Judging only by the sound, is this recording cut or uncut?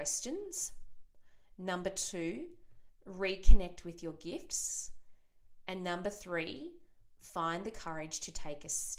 uncut